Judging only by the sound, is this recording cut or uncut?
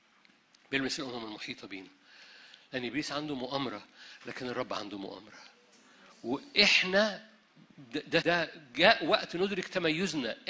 cut